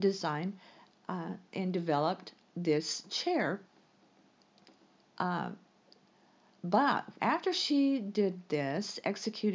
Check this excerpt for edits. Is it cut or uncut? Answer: cut